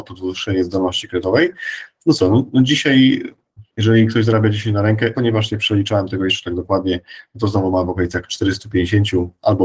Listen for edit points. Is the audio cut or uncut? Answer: cut